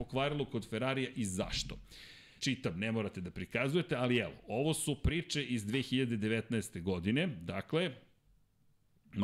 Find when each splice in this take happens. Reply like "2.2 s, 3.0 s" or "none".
2.4 s

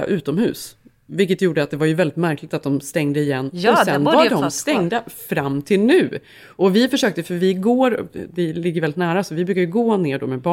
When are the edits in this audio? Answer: none

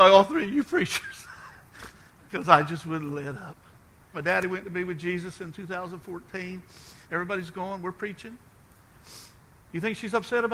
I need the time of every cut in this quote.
4.1 s, 7.0 s

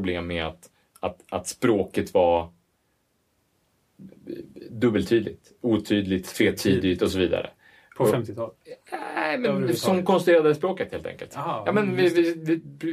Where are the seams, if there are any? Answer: none

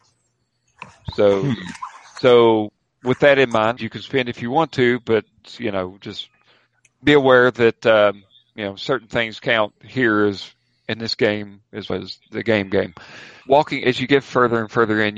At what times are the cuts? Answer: 3.8 s, 11.9 s, 13.4 s

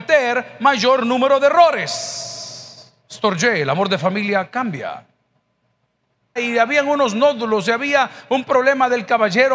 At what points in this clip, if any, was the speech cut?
3.0 s, 6.4 s

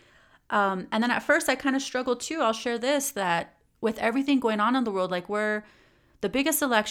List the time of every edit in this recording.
none

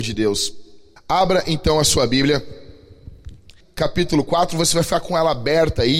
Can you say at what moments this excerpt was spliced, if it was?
1.0 s, 3.6 s

